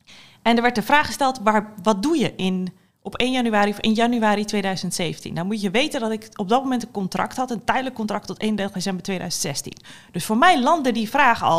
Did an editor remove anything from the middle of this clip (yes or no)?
no